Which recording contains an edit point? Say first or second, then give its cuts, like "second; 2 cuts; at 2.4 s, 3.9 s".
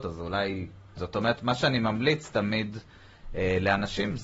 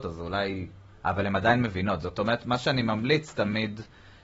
first; 1 cut; at 1.0 s